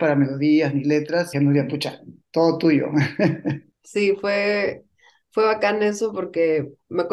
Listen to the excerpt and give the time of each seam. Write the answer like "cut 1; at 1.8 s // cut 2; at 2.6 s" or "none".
cut 1; at 1.3 s